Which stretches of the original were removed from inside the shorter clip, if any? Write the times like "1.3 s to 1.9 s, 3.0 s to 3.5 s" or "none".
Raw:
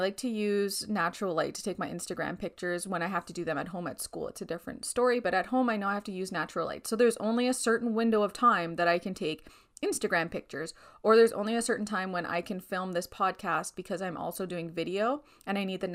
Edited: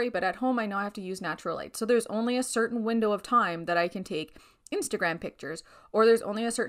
none